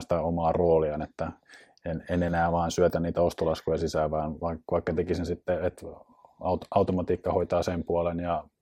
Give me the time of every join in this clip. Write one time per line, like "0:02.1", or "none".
none